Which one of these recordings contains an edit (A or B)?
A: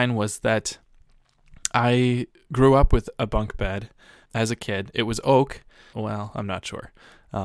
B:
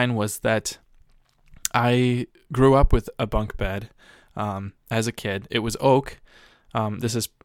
A